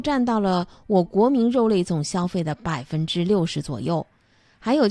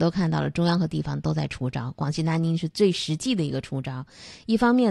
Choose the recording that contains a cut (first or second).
first